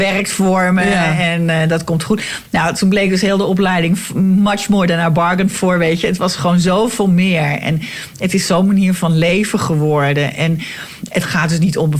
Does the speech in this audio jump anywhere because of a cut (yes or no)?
no